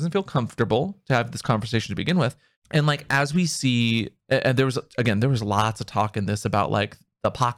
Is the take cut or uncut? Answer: cut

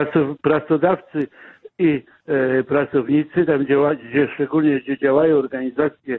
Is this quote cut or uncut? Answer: uncut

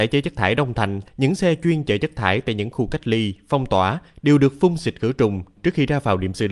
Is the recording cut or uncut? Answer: cut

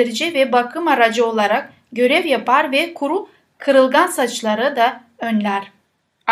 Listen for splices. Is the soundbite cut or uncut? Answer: uncut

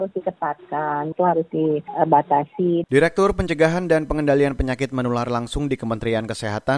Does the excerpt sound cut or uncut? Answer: cut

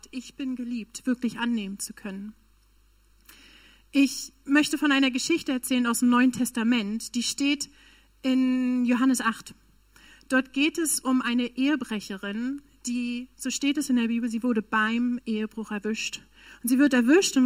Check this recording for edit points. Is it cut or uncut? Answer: uncut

